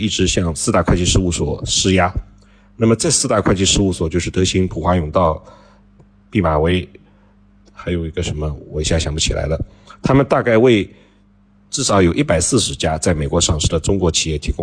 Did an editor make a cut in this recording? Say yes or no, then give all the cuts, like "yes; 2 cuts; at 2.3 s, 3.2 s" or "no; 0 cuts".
no; 0 cuts